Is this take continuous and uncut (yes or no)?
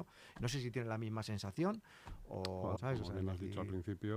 no